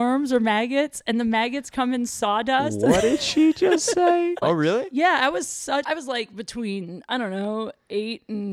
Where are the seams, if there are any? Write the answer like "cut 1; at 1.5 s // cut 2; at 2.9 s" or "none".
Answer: cut 1; at 4.4 s // cut 2; at 5.8 s